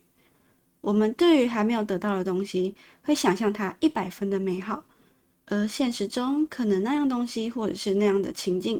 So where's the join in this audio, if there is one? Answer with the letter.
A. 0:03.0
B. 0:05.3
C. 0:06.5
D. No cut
B